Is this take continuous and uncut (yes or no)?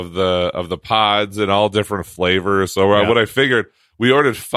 yes